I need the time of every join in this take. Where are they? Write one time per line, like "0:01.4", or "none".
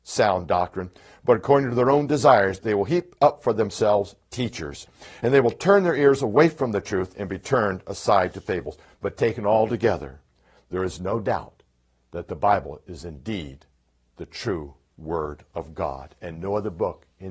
0:02.6
0:08.8